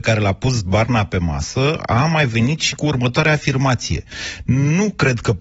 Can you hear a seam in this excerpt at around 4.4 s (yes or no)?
no